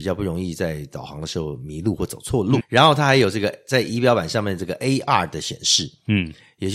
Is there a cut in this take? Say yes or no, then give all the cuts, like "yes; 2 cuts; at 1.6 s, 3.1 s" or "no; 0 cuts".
yes; 1 cut; at 2.6 s